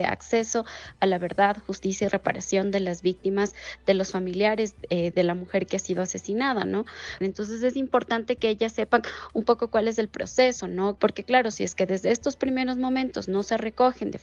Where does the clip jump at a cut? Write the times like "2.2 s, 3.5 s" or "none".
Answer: 7.2 s, 11.0 s

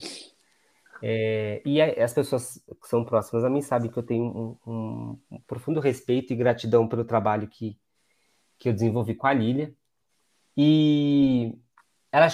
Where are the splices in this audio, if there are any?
none

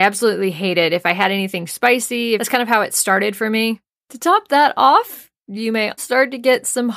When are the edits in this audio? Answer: 2.4 s, 3.9 s, 6.0 s

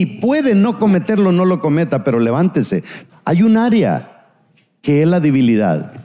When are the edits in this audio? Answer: 3.1 s

